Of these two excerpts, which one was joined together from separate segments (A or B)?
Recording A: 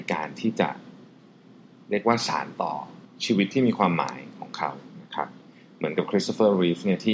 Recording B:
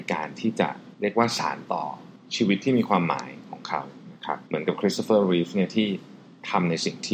B